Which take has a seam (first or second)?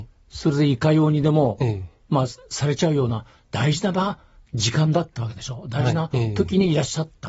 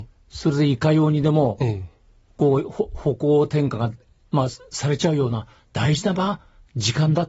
first